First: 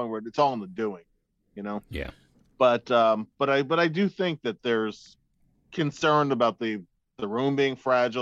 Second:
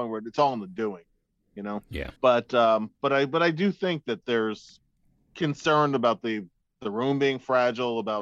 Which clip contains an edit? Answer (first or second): second